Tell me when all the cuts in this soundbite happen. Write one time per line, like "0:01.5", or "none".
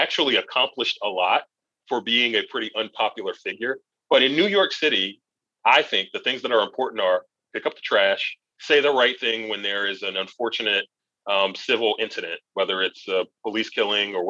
0:08.5